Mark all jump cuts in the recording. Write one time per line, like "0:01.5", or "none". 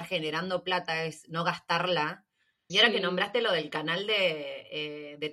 0:02.7